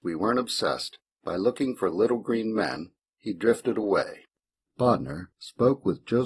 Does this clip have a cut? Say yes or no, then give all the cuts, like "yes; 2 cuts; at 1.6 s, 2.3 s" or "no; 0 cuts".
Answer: no; 0 cuts